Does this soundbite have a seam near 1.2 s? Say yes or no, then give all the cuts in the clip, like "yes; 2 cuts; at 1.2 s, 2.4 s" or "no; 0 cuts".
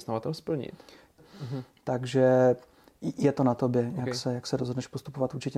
yes; 1 cut; at 1.2 s